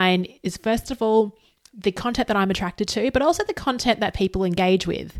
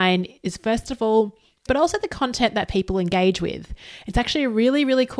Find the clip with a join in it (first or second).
second